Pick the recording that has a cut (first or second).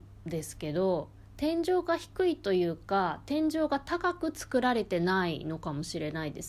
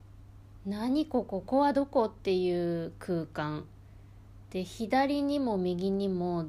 second